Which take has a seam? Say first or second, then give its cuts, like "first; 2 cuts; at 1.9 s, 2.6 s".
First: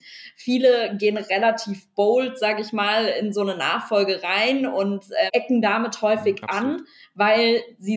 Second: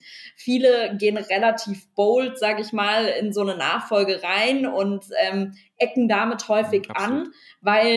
first; 1 cut; at 5.3 s